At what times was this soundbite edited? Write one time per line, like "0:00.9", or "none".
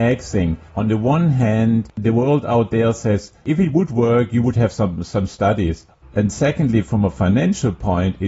0:06.0